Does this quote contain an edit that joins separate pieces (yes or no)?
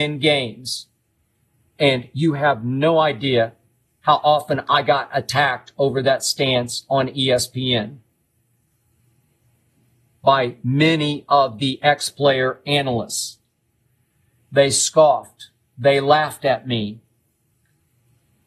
no